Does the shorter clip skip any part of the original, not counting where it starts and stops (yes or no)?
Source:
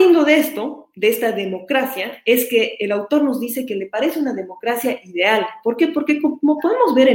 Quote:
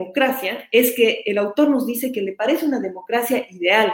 no